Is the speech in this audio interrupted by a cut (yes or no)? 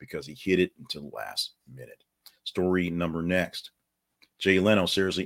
no